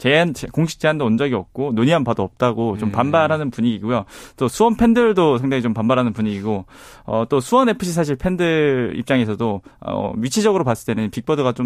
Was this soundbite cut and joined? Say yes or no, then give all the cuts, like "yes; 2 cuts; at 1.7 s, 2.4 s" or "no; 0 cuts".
no; 0 cuts